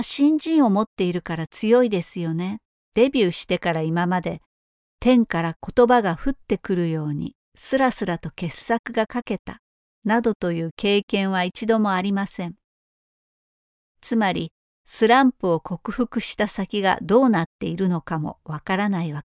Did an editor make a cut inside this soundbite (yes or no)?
yes